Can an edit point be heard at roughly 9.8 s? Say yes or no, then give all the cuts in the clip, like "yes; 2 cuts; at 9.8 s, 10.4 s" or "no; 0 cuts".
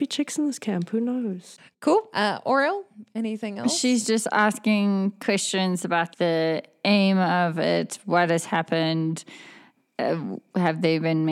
no; 1 cut; at 6.1 s